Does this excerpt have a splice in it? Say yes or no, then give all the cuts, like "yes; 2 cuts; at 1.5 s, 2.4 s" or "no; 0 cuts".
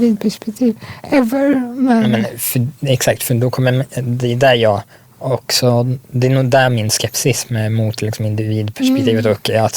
no; 0 cuts